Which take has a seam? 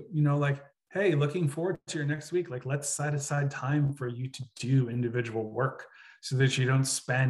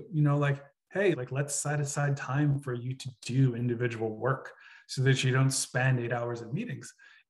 second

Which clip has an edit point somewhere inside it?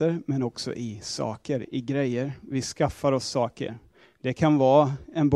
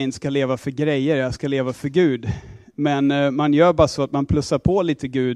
first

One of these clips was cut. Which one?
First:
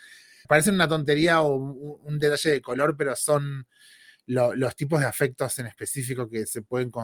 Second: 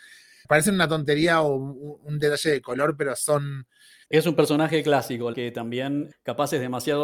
second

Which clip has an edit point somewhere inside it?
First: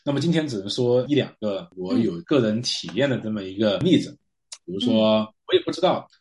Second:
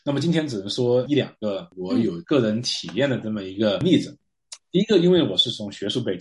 first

